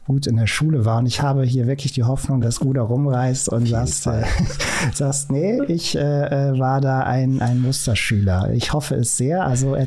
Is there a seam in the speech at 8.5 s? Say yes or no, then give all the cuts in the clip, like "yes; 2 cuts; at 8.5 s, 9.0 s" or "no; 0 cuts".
no; 1 cut; at 2.4 s